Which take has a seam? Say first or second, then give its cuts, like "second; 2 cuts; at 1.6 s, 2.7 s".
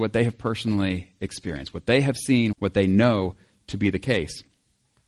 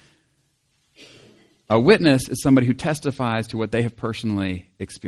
first; 1 cut; at 2.5 s